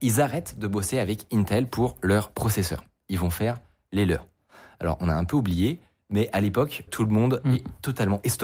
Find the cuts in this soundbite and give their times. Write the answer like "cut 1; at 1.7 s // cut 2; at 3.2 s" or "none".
cut 1; at 6.9 s